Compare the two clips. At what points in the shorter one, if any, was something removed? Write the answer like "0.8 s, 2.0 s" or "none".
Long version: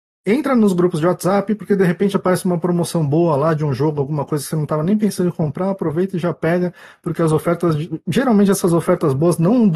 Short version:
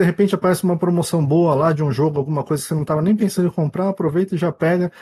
none